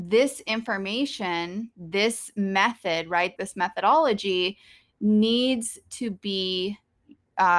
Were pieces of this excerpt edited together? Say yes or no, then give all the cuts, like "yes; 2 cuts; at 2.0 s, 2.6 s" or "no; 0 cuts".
yes; 1 cut; at 3.4 s